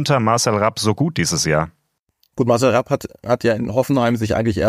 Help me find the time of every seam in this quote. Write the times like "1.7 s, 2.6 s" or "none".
none